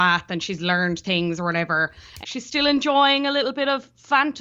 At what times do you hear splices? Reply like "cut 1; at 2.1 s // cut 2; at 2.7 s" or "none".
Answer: cut 1; at 2.2 s